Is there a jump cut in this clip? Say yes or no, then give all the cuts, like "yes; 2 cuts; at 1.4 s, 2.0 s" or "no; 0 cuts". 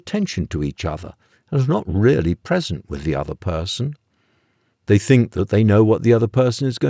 no; 0 cuts